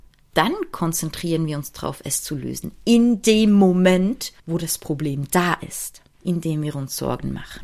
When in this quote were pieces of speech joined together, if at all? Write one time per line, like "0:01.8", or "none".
0:04.4
0:06.1

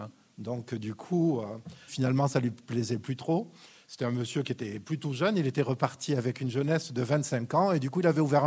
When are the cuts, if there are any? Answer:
0:01.9

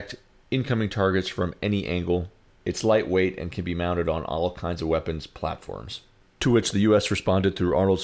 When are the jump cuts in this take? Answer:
none

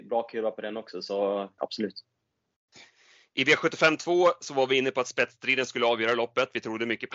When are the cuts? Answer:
0:01.6

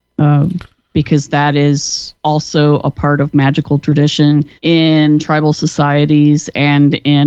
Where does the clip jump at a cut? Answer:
0:02.2
0:04.6

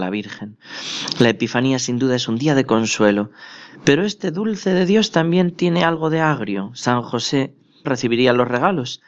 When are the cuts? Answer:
0:07.8

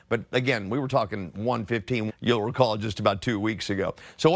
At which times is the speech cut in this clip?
0:02.1

